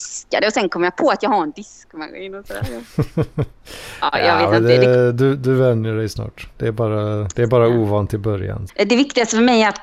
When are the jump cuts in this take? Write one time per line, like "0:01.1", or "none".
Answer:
0:07.3
0:08.7